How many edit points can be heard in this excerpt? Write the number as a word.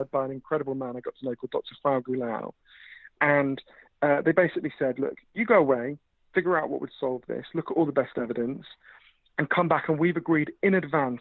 zero